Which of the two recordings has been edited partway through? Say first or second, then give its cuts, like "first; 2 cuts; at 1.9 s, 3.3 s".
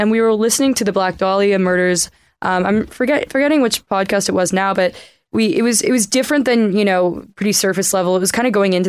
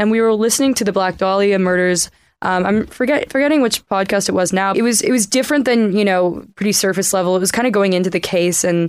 second; 1 cut; at 4.7 s